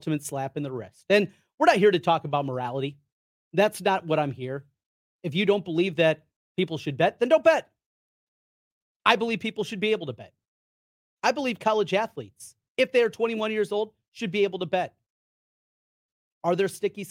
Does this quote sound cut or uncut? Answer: uncut